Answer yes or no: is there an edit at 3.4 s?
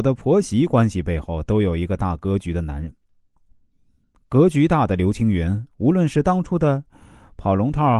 yes